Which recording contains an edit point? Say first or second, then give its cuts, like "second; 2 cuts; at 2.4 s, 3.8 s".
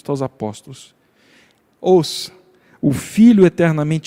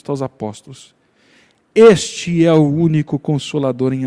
first; 1 cut; at 1.6 s